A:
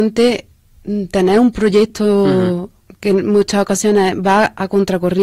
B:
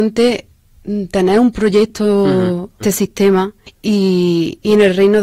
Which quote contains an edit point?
B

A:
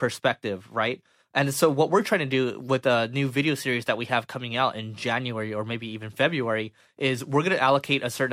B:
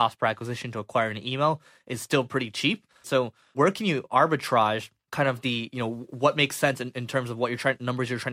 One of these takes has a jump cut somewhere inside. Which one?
B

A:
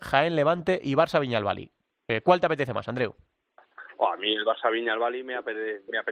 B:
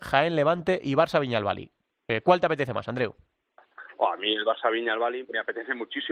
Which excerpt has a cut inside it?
B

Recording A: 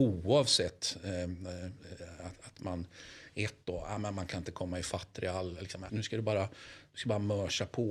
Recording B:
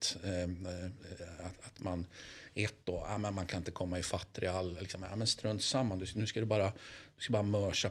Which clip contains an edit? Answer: A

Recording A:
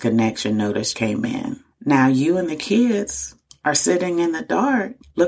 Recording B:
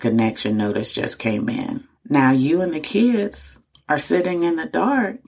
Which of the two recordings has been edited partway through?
A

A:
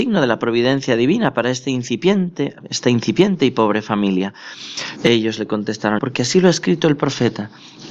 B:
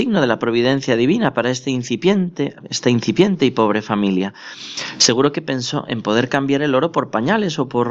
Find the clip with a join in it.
A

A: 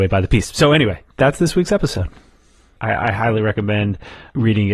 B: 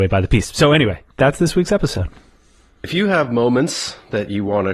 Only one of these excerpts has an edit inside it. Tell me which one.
A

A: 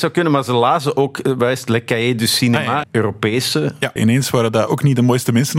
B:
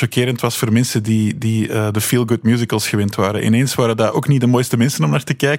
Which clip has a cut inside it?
A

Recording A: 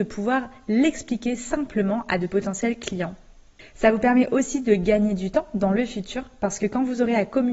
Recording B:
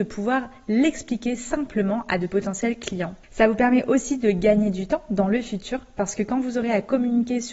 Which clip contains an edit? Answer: B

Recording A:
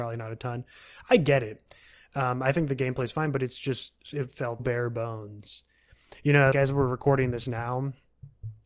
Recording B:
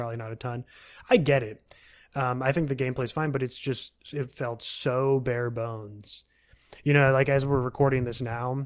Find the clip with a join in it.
A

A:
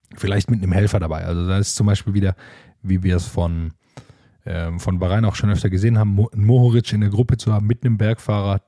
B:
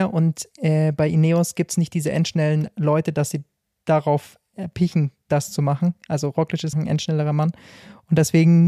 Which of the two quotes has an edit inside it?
B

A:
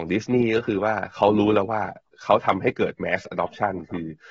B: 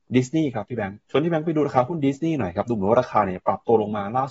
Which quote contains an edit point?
B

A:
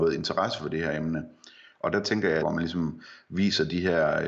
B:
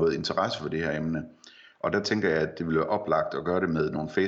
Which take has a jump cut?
A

